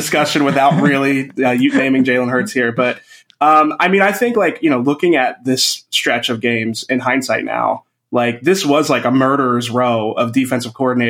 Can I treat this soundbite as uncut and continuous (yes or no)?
yes